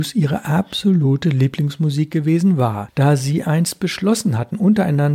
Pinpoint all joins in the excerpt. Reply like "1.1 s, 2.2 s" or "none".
none